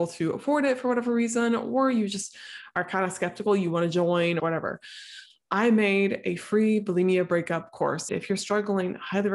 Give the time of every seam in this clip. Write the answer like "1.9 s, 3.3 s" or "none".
4.4 s, 8.1 s

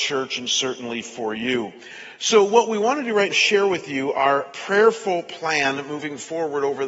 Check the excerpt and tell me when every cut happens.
3.3 s

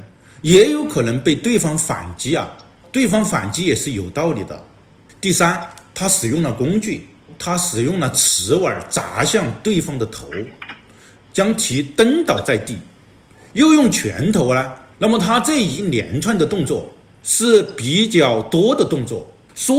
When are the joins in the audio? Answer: 11.2 s, 14.9 s

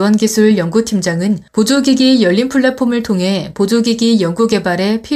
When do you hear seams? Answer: 1.5 s

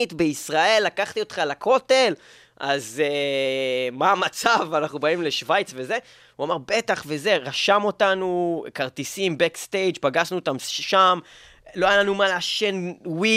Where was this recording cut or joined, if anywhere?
none

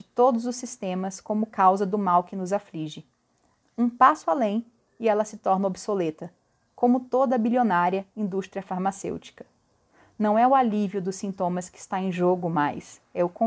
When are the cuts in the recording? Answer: 3.6 s

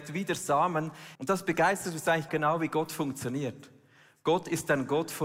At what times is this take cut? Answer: 1.1 s, 2.3 s

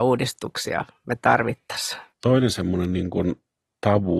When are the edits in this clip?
2.1 s

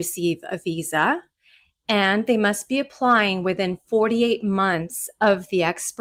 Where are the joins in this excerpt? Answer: none

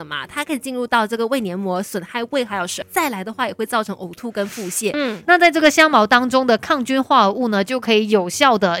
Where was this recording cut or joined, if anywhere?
2.8 s, 4.9 s

